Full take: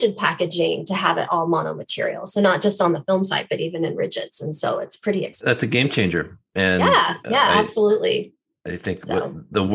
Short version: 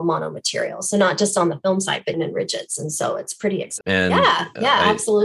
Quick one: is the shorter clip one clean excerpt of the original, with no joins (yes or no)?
no